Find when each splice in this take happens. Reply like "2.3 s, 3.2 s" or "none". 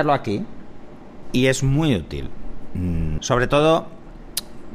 1.2 s, 3.2 s